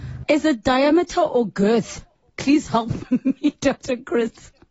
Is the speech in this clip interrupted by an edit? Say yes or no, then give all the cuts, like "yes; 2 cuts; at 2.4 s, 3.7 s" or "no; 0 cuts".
no; 0 cuts